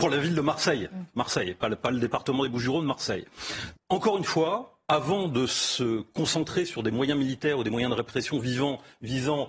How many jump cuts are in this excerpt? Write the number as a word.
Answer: two